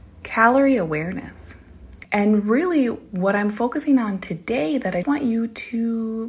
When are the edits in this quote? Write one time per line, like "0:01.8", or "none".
0:02.0
0:05.0